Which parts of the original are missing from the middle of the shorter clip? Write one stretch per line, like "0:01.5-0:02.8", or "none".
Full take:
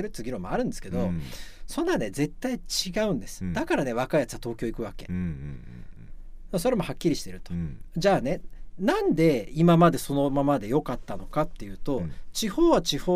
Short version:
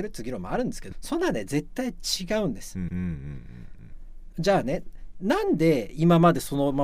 0:00.9-0:01.6
0:03.5-0:05.1
0:06.5-0:07.9